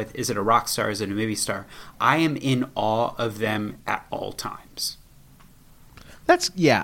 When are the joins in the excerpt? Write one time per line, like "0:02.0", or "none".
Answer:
none